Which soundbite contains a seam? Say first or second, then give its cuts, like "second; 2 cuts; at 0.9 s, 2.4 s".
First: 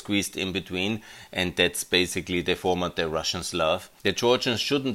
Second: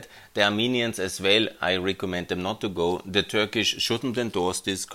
first; 1 cut; at 4.0 s